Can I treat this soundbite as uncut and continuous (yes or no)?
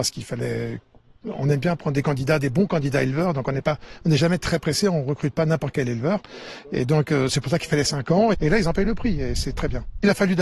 no